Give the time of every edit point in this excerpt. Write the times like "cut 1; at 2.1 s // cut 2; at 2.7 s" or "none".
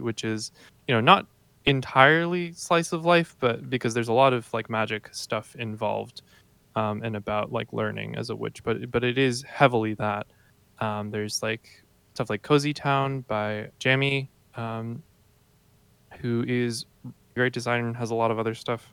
cut 1; at 13.7 s // cut 2; at 17.4 s

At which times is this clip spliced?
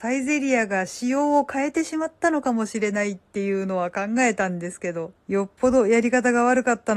cut 1; at 5.2 s

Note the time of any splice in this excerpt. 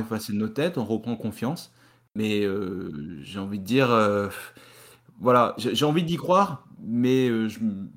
none

